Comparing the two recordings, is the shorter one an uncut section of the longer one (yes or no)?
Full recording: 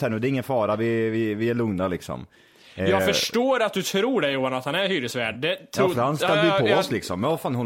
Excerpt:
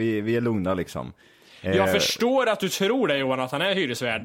yes